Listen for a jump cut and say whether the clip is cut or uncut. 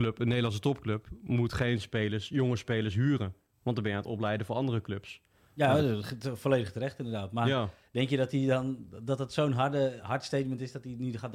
uncut